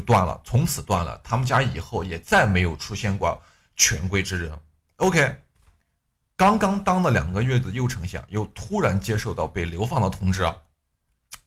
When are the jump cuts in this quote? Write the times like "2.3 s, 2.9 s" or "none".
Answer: none